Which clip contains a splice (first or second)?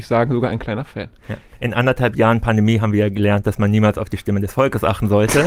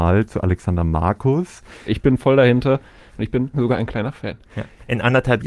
second